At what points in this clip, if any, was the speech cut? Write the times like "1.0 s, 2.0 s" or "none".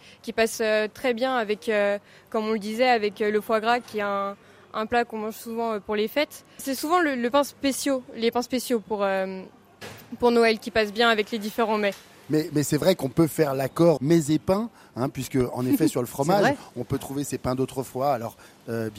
6.6 s, 14.0 s